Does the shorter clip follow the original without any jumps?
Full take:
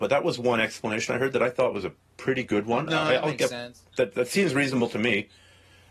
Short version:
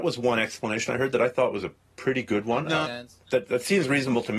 no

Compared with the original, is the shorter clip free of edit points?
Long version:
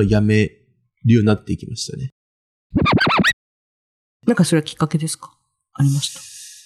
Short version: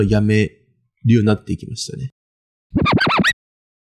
yes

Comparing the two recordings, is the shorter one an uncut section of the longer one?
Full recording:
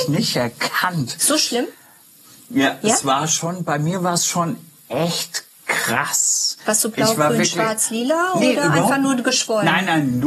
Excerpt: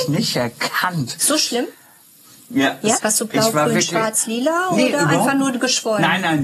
no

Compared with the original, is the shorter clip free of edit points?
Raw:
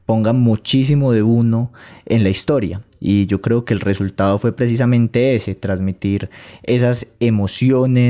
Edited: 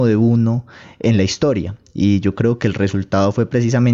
yes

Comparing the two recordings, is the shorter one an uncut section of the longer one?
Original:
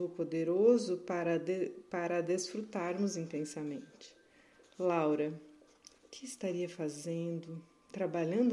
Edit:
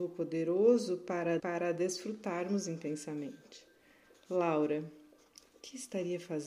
no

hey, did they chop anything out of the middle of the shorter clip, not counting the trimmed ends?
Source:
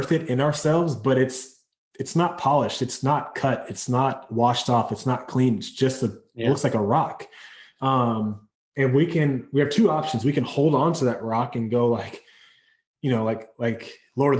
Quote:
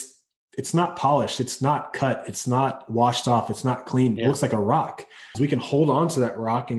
yes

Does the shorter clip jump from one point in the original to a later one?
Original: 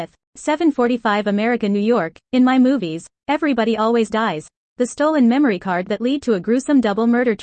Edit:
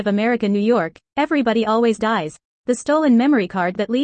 yes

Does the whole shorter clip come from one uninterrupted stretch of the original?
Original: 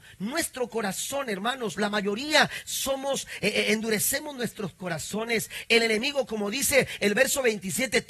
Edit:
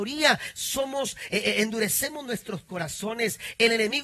yes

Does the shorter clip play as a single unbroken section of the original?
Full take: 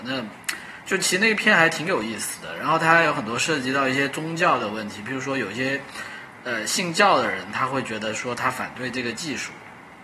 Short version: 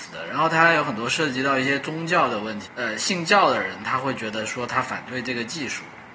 no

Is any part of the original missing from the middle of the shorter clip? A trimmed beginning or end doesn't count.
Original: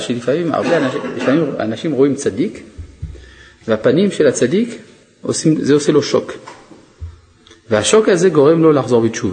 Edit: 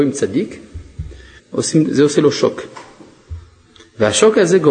yes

